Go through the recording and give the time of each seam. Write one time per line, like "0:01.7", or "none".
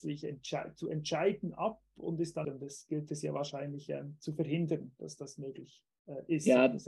0:02.4